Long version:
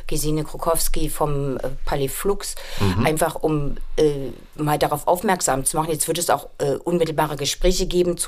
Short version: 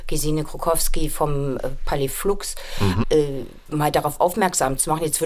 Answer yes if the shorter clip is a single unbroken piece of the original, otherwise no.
no